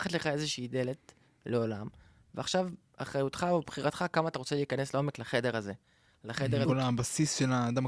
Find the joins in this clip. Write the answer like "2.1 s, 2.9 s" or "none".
6.7 s